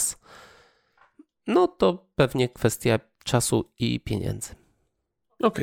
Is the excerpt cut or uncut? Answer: uncut